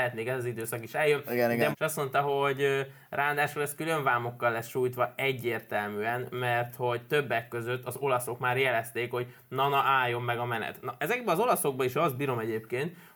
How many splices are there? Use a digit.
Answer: 1